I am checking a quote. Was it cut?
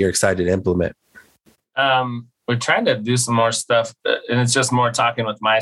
no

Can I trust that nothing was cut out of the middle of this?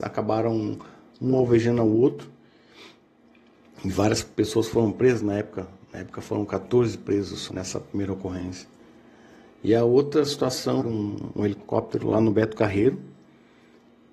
no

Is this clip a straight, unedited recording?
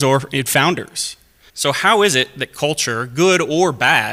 no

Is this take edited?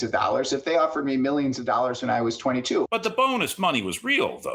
yes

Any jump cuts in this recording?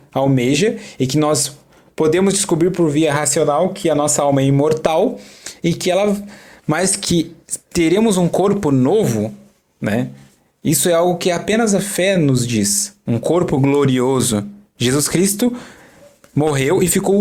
no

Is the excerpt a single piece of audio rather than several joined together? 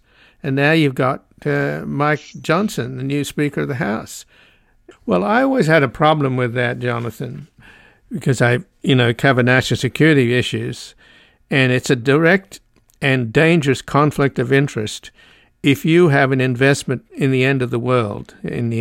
no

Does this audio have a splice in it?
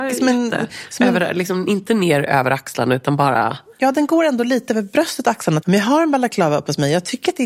yes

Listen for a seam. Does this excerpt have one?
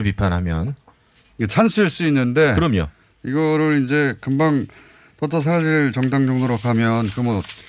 no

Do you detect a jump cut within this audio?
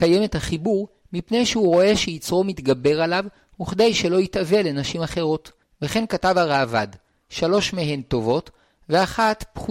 yes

